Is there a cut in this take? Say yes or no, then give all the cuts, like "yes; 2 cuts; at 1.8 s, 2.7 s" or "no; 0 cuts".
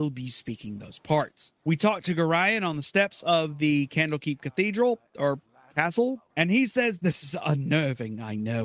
yes; 2 cuts; at 1.6 s, 6.3 s